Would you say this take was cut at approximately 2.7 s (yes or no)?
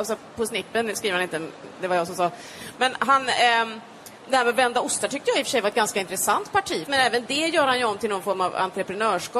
no